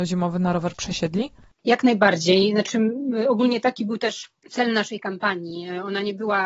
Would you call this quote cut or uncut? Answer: cut